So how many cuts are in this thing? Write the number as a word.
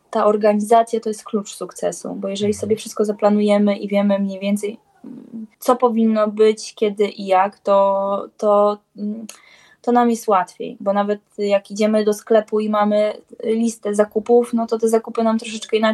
one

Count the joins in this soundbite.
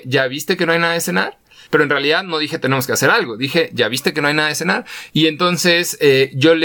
two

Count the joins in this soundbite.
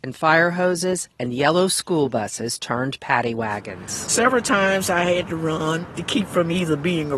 zero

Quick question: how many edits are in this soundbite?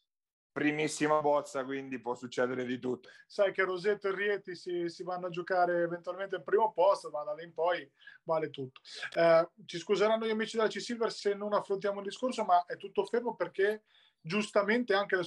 one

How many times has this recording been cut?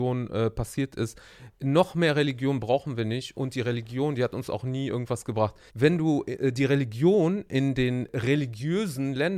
one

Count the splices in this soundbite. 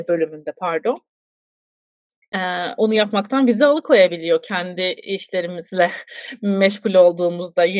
zero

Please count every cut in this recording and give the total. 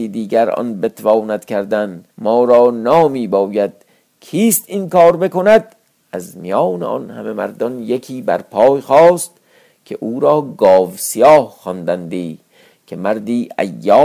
one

